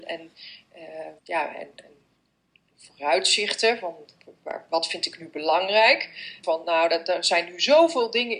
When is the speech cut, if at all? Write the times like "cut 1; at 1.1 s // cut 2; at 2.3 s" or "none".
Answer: cut 1; at 1.2 s // cut 2; at 6.4 s